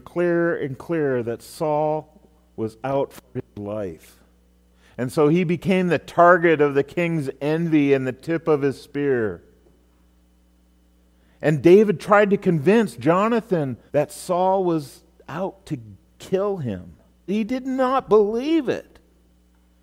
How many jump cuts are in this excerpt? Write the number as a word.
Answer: two